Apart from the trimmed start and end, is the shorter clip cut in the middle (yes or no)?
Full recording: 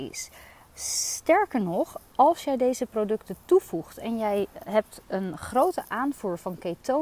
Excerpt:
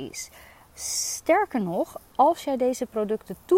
no